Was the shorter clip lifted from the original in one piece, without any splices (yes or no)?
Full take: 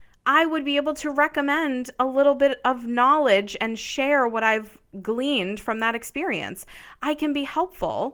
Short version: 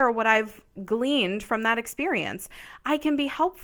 yes